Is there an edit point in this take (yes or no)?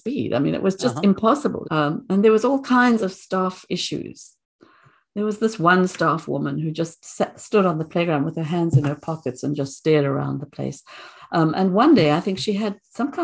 yes